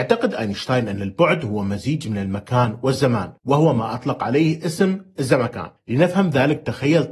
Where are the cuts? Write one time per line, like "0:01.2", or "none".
0:03.4